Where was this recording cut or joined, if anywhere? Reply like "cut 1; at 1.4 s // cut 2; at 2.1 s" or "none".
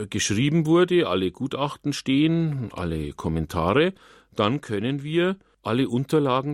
none